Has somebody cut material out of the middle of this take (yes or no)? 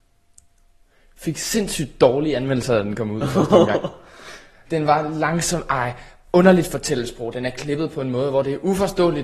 yes